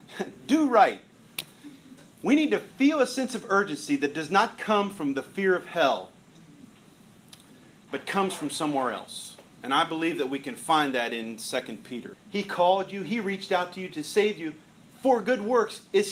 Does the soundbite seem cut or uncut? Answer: cut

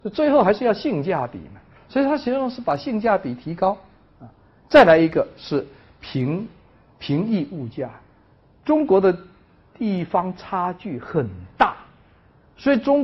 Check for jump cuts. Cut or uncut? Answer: uncut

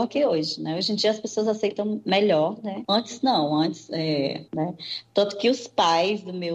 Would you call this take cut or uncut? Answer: cut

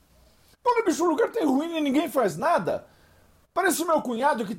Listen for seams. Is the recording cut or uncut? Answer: uncut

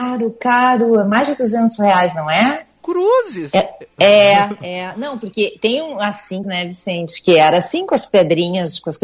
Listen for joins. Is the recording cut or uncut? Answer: cut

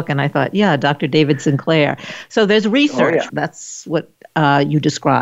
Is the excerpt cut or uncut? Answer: cut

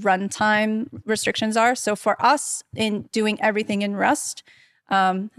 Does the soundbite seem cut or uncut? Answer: uncut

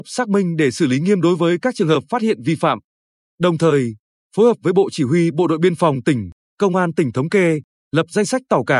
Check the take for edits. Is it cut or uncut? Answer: uncut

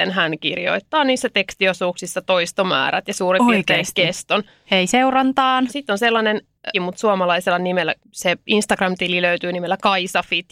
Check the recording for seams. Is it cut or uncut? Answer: cut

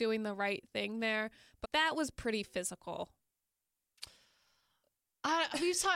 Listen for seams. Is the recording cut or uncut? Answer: cut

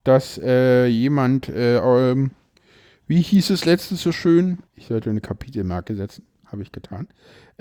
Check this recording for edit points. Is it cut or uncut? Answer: cut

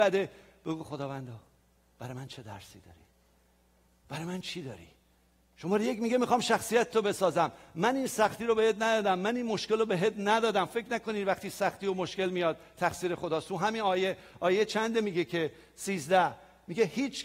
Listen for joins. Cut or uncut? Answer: uncut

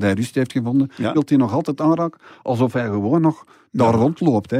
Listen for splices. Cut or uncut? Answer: cut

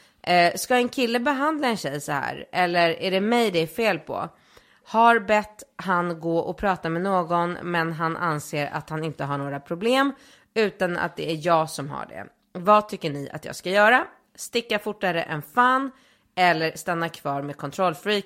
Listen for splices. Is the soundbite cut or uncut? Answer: uncut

